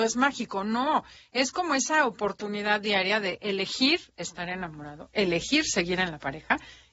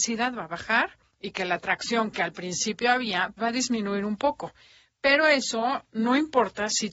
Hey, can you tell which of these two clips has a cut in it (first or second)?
second